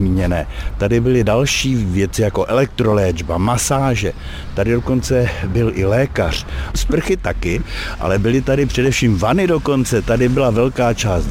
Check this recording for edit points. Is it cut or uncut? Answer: cut